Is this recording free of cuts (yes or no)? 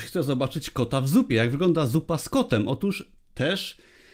yes